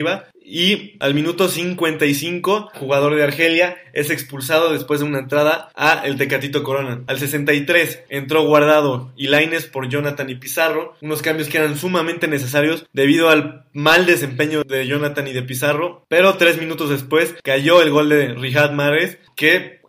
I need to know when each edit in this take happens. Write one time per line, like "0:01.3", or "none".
0:02.7

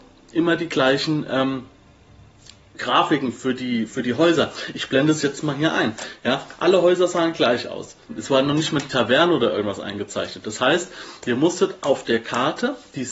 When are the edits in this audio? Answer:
0:08.1

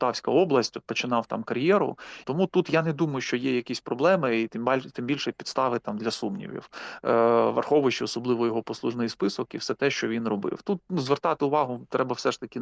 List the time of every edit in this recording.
0:02.2

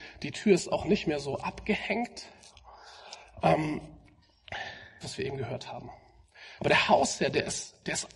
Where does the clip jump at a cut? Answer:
0:05.0
0:06.6

